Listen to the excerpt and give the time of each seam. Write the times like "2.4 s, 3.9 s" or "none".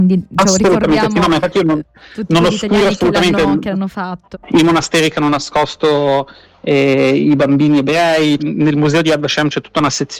4.3 s, 8.4 s